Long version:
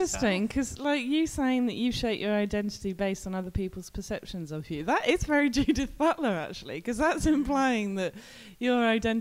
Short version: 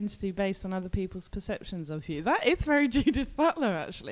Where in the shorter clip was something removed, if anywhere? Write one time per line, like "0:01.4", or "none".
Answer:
none